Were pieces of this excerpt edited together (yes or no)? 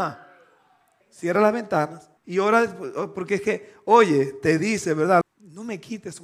yes